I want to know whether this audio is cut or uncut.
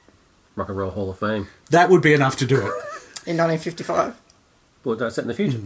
uncut